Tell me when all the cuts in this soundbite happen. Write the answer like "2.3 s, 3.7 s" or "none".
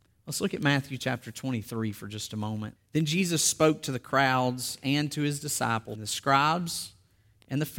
2.8 s, 6.0 s